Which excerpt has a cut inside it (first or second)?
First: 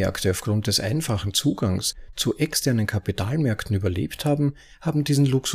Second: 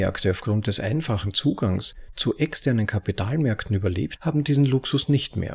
second